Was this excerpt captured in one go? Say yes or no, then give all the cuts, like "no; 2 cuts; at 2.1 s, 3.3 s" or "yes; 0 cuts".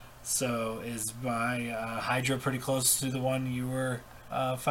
yes; 0 cuts